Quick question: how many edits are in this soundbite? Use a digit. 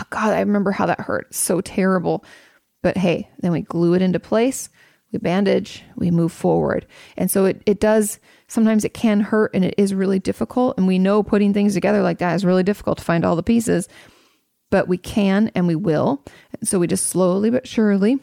0